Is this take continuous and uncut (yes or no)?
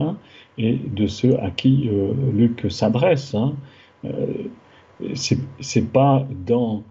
yes